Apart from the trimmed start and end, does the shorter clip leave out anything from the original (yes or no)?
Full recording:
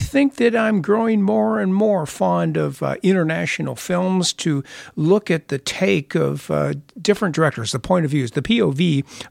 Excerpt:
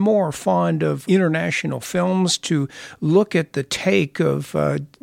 yes